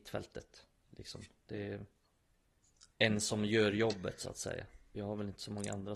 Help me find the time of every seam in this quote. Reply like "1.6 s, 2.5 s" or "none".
none